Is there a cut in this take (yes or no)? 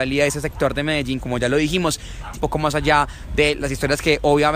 yes